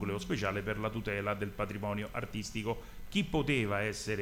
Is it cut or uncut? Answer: uncut